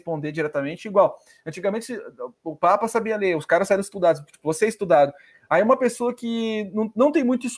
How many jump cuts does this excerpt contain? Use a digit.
0